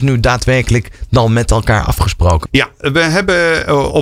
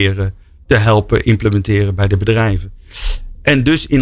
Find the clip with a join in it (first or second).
first